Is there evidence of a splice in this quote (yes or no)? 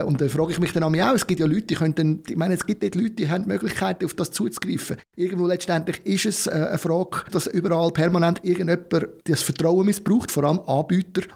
yes